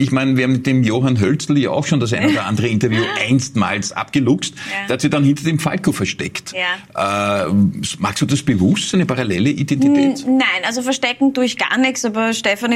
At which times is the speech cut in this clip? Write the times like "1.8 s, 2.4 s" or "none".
none